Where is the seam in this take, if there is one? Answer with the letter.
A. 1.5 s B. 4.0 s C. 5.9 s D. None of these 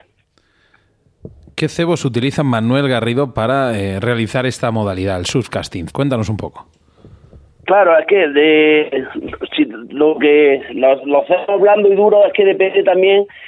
C